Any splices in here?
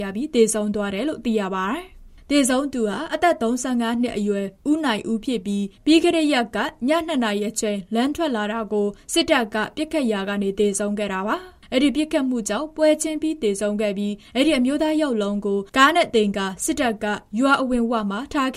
no; 0 cuts

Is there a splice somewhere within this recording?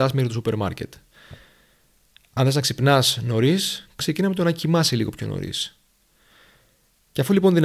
no; 0 cuts

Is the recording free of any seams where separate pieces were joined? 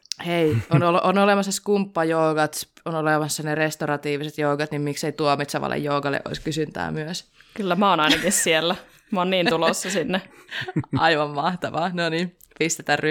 yes; 0 cuts

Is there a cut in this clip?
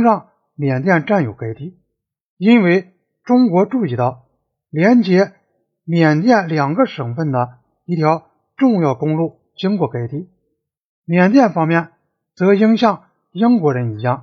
no; 0 cuts

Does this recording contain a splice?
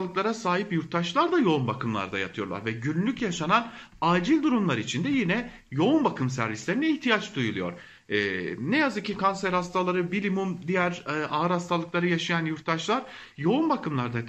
no; 0 cuts

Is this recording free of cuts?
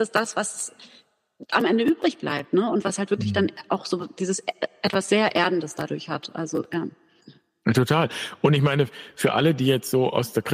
yes; 0 cuts

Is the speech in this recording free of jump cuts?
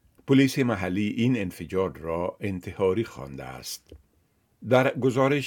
yes; 0 cuts

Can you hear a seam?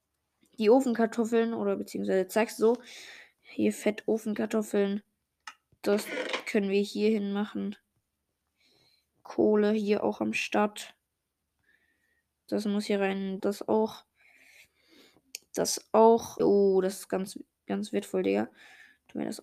yes; 2 cuts; at 13.4 s, 16.4 s

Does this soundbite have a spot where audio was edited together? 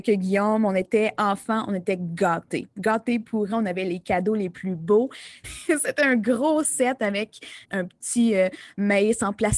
yes; 2 cuts; at 5.4 s, 7.6 s

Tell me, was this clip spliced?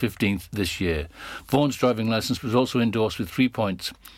no; 0 cuts

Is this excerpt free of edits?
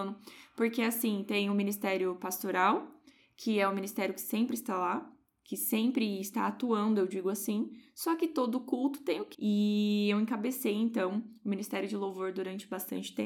no; 1 cut; at 9.3 s

